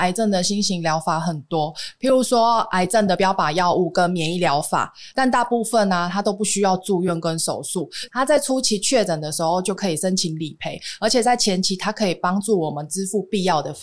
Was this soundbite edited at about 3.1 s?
no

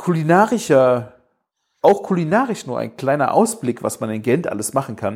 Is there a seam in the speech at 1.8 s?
yes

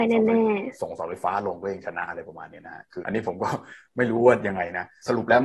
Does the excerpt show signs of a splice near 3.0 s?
yes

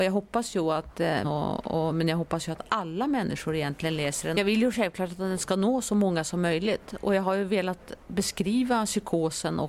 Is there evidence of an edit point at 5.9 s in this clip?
no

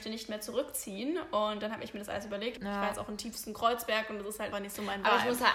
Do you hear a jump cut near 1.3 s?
no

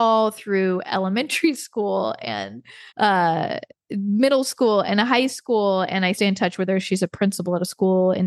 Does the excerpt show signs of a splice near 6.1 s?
yes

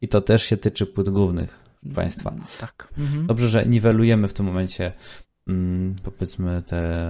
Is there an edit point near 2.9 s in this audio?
yes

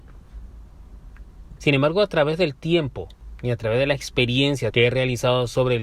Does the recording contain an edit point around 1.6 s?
yes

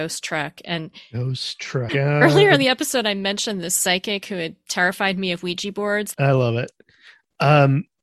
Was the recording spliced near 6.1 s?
yes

